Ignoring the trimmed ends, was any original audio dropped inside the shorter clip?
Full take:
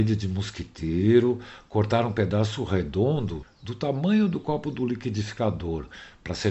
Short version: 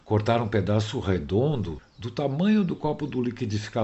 no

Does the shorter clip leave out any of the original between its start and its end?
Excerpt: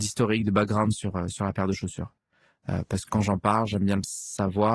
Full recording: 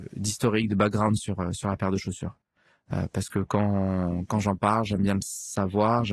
yes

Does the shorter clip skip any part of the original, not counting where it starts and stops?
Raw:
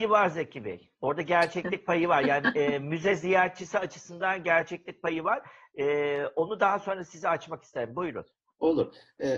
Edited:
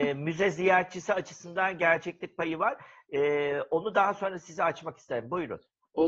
no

